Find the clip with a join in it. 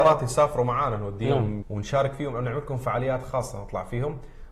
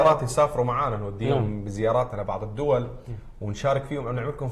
first; 1 cut; at 1.6 s

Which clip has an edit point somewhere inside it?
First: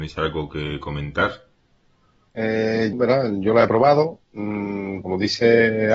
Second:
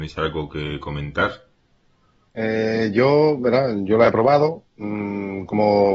first; 2 cuts; at 2.9 s, 5.0 s

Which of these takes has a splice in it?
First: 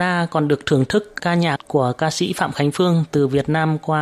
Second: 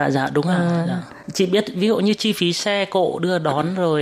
first; 1 cut; at 1.2 s

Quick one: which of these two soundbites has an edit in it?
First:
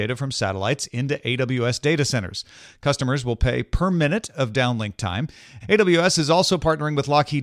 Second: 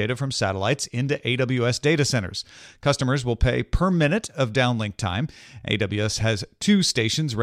first; 1 cut; at 5.6 s

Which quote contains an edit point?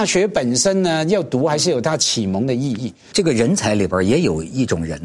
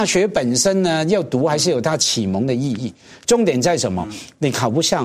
first; 1 cut; at 3.1 s

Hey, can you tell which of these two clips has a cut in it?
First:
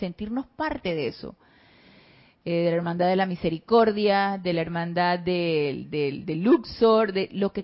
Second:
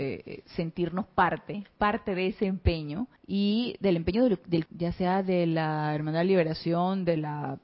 second; 2 cuts; at 3.2 s, 4.7 s

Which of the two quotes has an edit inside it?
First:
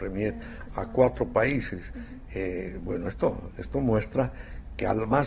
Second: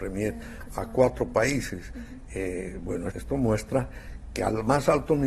second; 1 cut; at 3.1 s

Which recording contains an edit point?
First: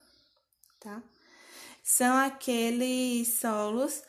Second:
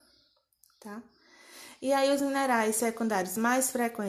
first; 1 cut; at 1.8 s

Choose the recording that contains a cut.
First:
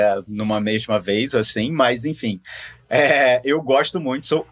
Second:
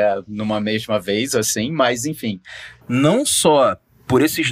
second; 1 cut; at 2.8 s

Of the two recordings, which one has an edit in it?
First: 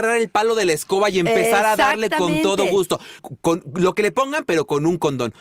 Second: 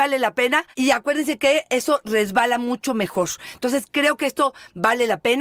first; 1 cut; at 3.2 s

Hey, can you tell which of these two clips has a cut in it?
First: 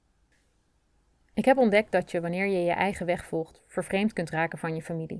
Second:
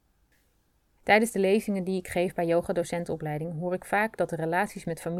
second; 1 cut; at 1.0 s

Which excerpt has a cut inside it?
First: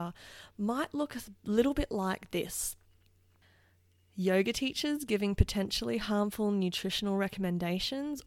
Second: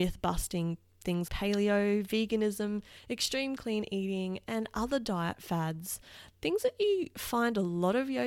second; 1 cut; at 1.3 s

